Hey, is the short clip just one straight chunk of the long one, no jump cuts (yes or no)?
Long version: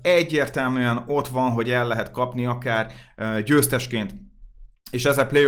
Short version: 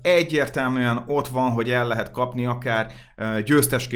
yes